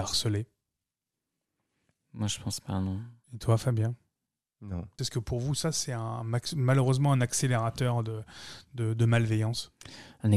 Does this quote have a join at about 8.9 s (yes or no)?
no